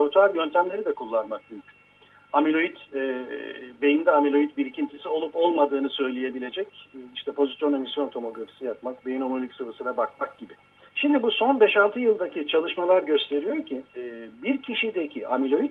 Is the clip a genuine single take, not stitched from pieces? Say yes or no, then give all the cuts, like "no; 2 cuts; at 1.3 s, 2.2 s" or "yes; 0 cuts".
no; 2 cuts; at 10.9 s, 13.9 s